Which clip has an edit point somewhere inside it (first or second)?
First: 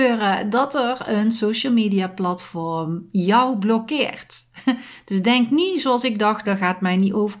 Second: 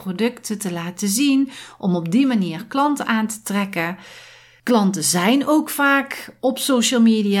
first